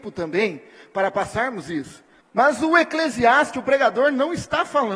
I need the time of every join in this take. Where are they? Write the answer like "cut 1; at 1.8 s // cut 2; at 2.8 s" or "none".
cut 1; at 2.2 s